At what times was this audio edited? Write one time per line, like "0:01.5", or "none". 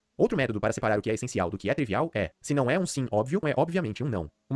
0:03.4